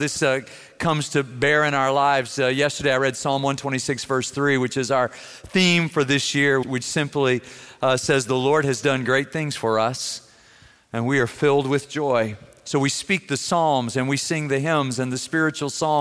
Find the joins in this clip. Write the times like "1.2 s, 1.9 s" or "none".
6.6 s